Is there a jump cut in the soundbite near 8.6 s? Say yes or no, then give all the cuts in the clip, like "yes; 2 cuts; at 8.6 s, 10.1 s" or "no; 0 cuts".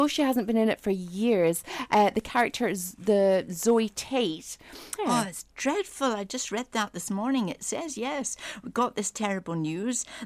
no; 1 cut; at 5.0 s